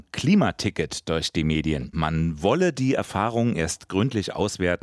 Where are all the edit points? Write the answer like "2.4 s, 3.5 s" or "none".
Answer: 1.9 s